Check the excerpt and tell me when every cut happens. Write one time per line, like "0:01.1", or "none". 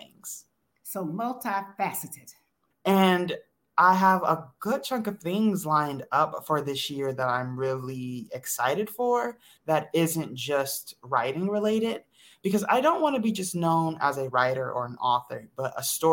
0:02.7